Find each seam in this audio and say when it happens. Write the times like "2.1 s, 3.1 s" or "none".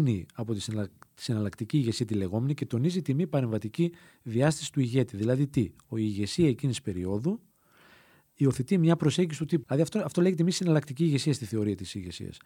9.6 s